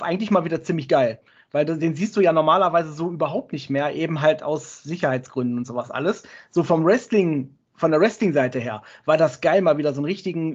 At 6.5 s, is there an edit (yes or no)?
no